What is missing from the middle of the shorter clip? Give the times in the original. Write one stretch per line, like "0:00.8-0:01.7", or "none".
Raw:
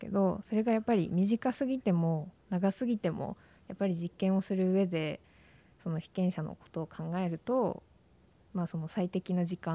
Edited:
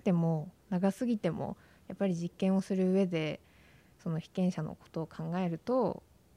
none